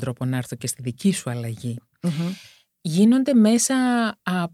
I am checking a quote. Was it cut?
no; 0 cuts

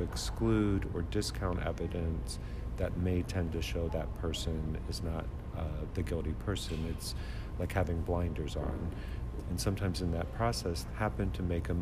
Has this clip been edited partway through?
yes; 3 cuts; at 3.9 s, 9.4 s, 10.9 s

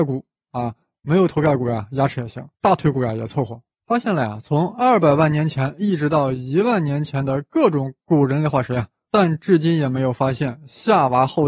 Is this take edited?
yes; 2 cuts; at 2.5 s, 3.7 s

